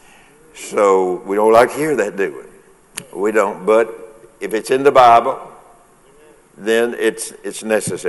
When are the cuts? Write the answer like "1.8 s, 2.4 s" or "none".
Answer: none